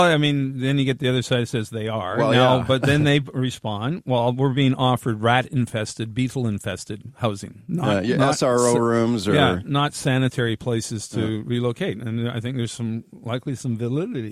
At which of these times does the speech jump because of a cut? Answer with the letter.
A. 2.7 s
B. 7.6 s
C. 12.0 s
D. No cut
D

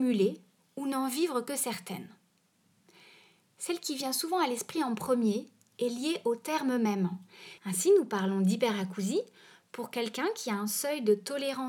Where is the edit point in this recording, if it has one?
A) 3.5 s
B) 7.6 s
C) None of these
B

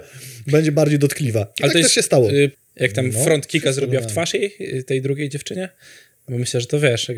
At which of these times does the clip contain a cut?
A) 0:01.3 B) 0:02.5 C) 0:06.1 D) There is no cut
B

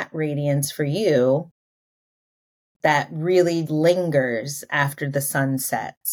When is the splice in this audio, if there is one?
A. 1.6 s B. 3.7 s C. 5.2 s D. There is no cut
B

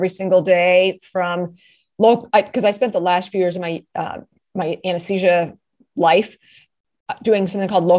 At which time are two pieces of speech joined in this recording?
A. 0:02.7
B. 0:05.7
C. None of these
C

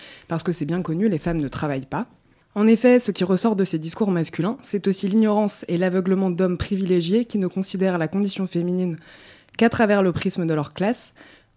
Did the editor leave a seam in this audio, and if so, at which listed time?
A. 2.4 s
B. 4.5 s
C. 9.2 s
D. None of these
D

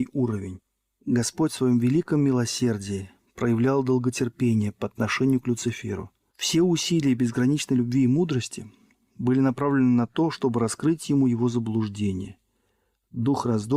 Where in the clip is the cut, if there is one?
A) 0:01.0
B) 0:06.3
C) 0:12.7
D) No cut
B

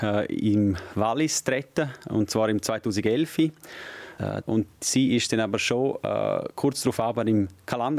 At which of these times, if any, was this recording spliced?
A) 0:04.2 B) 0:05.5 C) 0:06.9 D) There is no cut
A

